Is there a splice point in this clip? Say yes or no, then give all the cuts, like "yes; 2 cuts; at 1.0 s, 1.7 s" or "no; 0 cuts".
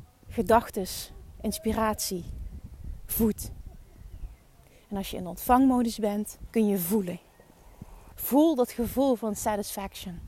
yes; 2 cuts; at 6.5 s, 8.1 s